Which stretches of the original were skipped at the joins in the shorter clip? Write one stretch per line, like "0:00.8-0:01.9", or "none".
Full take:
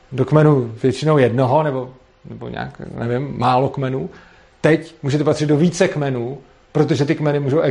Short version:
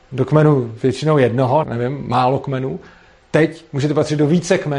0:01.6-0:02.9